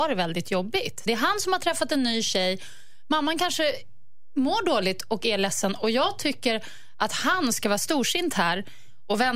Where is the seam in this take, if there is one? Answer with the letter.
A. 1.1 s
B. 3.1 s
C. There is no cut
A